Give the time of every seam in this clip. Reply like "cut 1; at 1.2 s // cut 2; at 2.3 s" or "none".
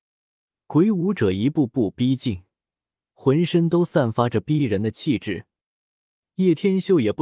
none